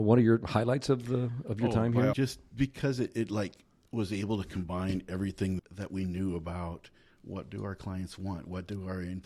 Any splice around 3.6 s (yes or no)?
no